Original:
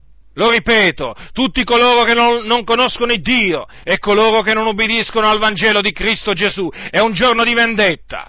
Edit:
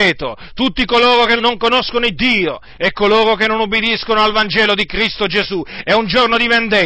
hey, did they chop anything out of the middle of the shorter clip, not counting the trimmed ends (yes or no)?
yes